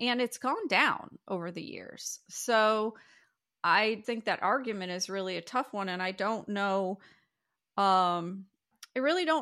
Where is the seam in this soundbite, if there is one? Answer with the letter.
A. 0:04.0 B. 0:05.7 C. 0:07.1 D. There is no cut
A